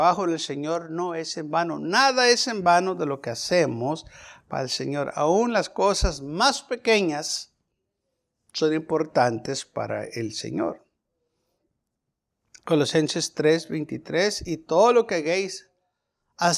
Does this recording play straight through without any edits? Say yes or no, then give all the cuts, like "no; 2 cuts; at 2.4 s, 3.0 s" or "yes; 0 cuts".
yes; 0 cuts